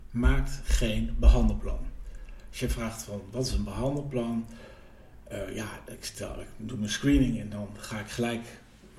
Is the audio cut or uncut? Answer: uncut